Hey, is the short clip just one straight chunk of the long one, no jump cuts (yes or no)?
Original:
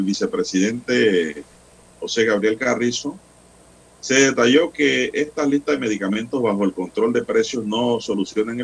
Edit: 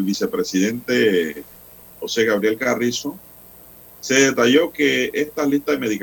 yes